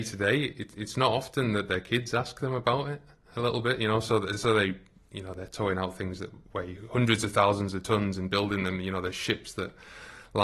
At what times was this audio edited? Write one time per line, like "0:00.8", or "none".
none